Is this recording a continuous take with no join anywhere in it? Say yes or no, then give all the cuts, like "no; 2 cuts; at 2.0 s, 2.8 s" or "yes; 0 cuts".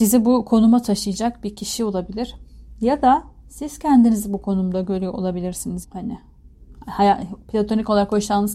no; 1 cut; at 5.8 s